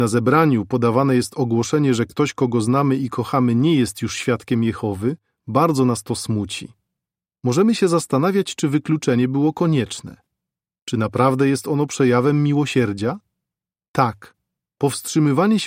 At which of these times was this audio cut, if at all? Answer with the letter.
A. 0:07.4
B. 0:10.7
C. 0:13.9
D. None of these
D